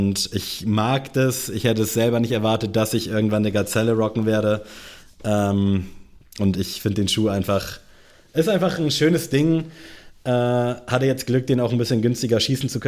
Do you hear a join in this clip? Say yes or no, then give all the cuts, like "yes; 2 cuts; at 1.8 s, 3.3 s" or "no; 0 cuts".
no; 0 cuts